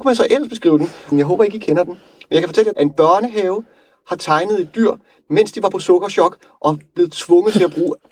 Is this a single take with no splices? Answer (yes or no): no